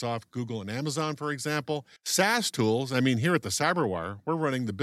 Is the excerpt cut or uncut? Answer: cut